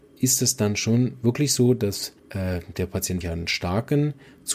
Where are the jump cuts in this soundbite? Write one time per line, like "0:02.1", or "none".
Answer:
0:02.2
0:03.2